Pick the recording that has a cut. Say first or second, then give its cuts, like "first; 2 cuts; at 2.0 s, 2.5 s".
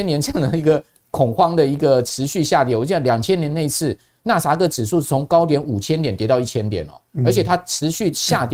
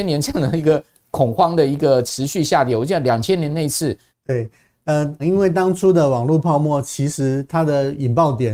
second; 2 cuts; at 4.1 s, 5.2 s